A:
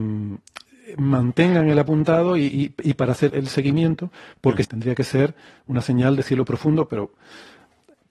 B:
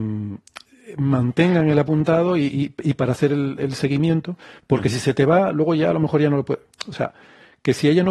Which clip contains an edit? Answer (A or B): A